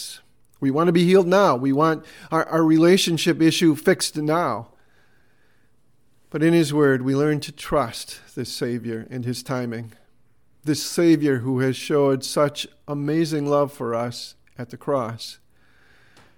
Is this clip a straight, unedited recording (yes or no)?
yes